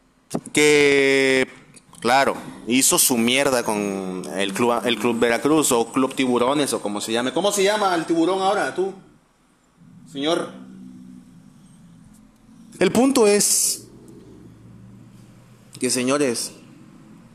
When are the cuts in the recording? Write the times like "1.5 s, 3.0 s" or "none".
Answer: 1.9 s, 12.8 s